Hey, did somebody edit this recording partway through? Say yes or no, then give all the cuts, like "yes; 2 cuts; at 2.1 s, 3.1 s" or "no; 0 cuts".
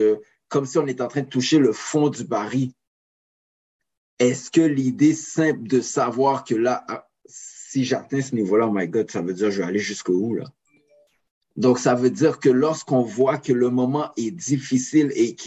yes; 1 cut; at 11.4 s